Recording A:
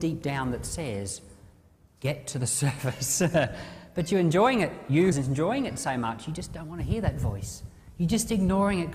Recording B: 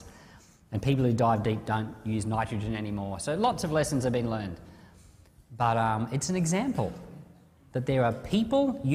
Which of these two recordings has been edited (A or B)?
A